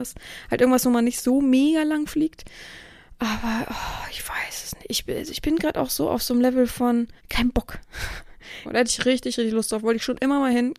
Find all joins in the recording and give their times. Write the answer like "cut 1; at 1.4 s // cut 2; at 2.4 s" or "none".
cut 1; at 7.2 s // cut 2; at 8.6 s

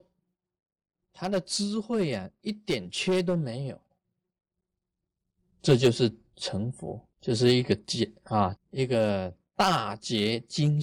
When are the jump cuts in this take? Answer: cut 1; at 7.1 s // cut 2; at 8.6 s

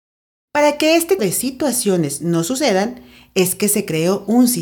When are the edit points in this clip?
cut 1; at 1.2 s

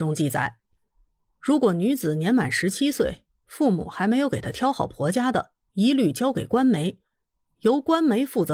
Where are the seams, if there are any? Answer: cut 1; at 5.6 s

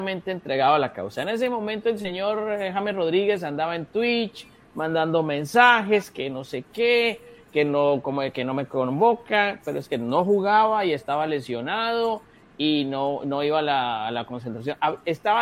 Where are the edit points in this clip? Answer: none

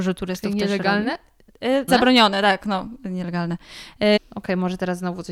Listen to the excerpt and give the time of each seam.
cut 1; at 1.9 s // cut 2; at 4.2 s

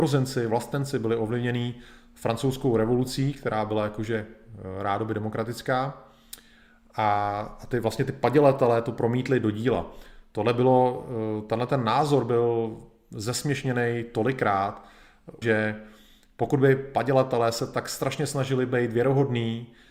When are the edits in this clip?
cut 1; at 15.4 s

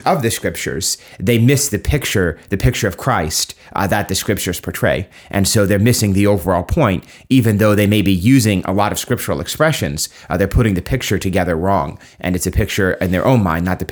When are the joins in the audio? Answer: none

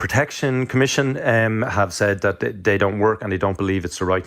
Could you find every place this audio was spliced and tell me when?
none

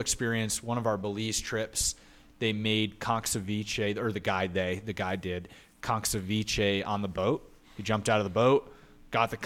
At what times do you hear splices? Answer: none

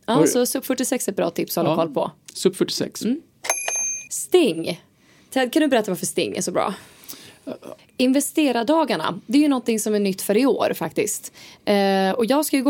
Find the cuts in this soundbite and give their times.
cut 1; at 4.1 s // cut 2; at 7.8 s

